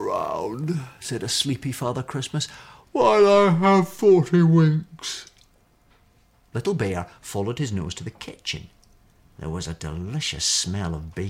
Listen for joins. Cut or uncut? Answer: uncut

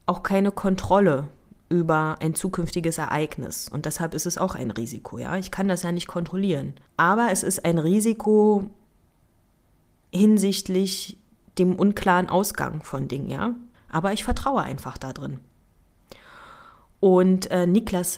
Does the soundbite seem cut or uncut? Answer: cut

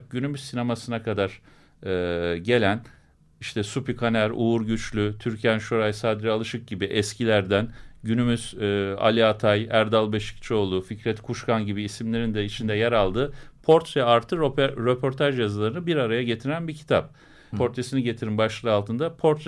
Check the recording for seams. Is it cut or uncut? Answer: cut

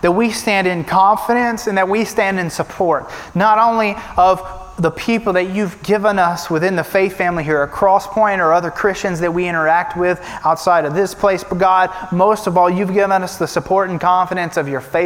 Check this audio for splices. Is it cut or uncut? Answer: uncut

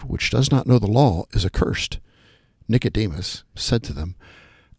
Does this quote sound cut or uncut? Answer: cut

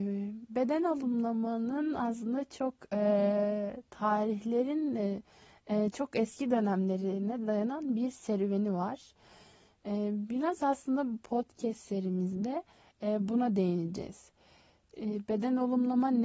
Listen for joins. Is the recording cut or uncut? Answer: uncut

